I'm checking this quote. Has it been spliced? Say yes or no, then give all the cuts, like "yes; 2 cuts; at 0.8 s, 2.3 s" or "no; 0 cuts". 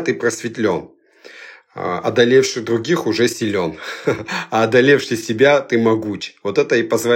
no; 0 cuts